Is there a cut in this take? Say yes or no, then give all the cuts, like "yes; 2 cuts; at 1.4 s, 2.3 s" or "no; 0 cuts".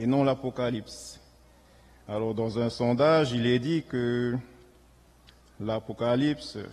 no; 0 cuts